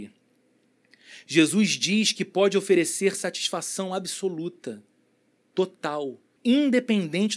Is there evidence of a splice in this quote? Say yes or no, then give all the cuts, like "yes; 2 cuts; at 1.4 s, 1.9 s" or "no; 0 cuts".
yes; 1 cut; at 6.4 s